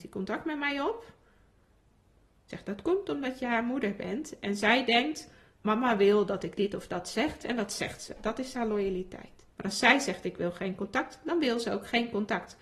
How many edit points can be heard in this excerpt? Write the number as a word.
two